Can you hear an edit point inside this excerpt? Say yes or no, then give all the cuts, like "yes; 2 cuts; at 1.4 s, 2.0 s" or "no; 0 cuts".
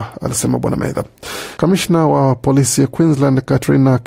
yes; 1 cut; at 1.6 s